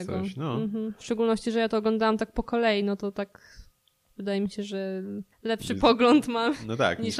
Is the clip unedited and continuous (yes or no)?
no